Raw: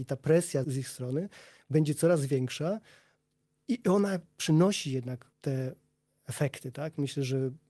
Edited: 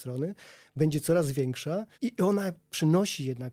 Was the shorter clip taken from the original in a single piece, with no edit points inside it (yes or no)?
no